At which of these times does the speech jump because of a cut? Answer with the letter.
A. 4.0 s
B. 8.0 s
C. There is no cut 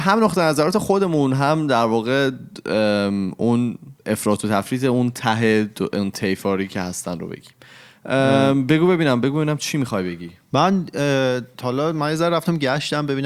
A